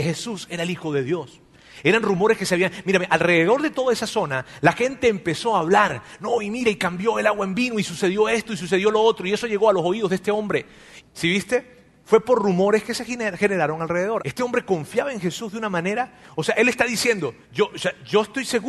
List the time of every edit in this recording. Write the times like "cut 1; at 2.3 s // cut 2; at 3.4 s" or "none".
cut 1; at 11.0 s // cut 2; at 14.2 s // cut 3; at 17.4 s